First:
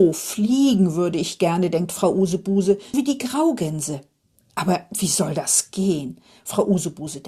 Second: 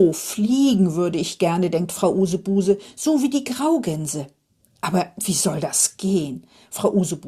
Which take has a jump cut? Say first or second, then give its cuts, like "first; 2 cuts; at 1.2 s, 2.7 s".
first; 1 cut; at 2.9 s